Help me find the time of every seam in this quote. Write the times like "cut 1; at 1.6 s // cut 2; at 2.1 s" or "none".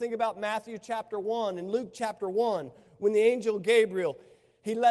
none